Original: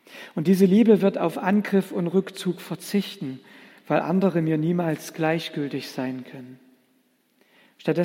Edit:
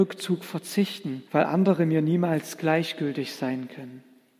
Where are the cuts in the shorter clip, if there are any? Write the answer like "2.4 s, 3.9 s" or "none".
1.3 s